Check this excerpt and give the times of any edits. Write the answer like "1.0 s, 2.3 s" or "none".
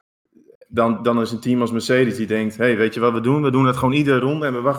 1.0 s